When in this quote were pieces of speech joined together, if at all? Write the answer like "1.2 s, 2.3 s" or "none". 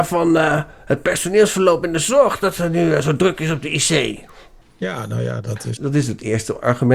5.8 s